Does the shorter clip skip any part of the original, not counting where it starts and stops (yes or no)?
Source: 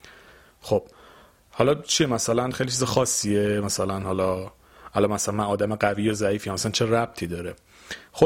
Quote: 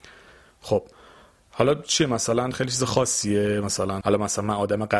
yes